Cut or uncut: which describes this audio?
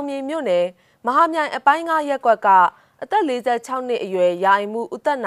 uncut